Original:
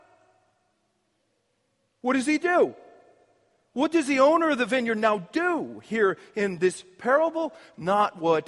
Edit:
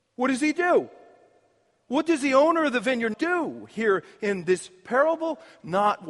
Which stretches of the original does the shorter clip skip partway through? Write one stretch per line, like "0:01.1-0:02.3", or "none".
0:05.0-0:05.3